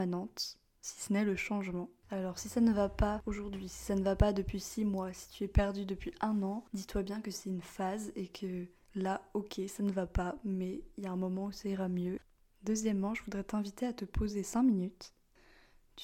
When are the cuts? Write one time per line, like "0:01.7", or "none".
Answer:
none